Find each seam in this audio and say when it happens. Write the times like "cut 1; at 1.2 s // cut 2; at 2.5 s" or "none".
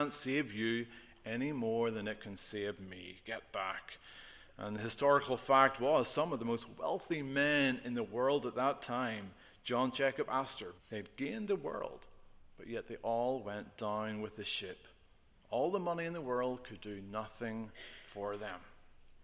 cut 1; at 10.8 s